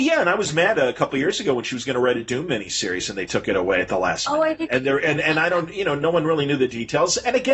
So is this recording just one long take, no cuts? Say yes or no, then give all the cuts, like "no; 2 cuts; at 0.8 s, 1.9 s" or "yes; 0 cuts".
yes; 0 cuts